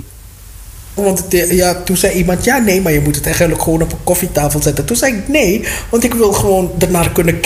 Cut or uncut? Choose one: cut